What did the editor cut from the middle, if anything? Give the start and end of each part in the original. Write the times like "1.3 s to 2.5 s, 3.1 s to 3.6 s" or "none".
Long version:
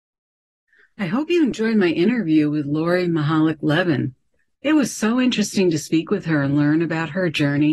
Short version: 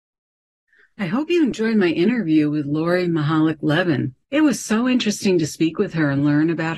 4.2 s to 4.6 s